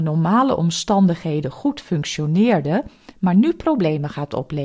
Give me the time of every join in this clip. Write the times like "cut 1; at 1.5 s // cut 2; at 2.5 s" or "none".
none

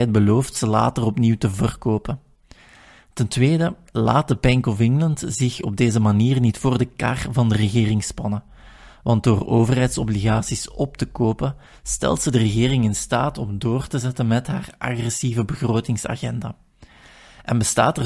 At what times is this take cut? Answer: none

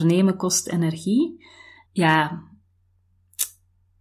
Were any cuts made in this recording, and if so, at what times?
cut 1; at 1.9 s

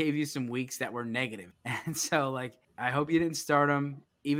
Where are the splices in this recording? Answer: cut 1; at 1.5 s // cut 2; at 2.6 s

